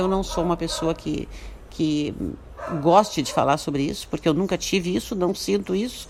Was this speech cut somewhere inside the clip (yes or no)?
no